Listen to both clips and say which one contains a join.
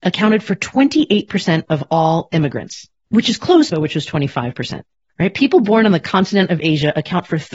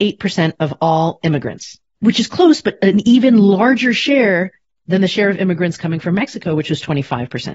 first; 1 cut; at 3.7 s

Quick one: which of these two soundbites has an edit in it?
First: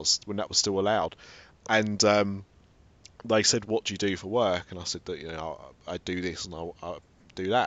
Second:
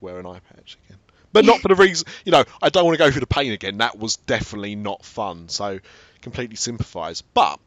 first; 1 cut; at 5.9 s

